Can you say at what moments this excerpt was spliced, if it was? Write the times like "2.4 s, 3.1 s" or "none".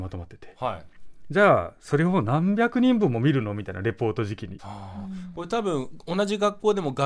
4.6 s

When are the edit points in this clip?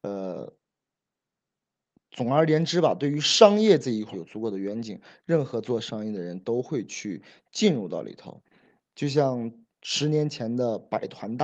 4.1 s

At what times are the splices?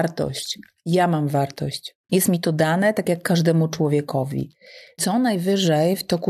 2.1 s, 5.0 s

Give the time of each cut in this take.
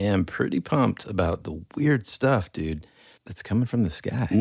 none

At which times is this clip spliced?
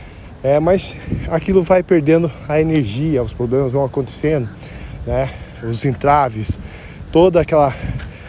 none

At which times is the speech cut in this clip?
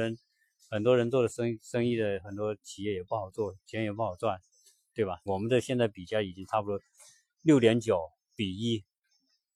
5.3 s

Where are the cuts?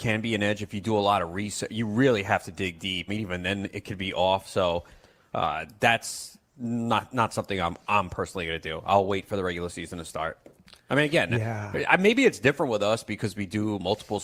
3.1 s

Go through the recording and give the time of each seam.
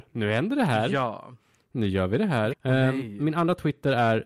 2.5 s

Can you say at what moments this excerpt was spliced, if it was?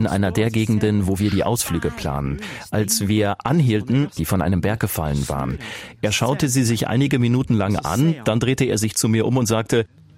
4.2 s

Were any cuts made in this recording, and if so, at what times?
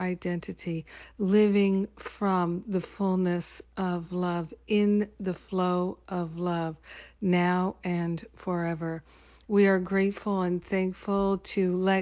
9.5 s

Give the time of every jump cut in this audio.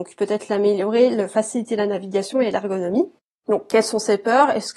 3.4 s

